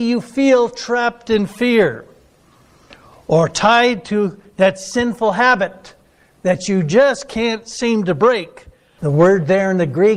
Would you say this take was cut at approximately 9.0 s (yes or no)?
yes